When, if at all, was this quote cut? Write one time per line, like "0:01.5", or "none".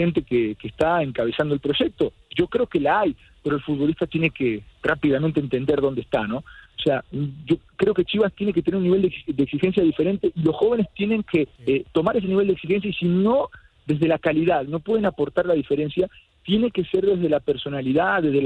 0:06.7
0:11.6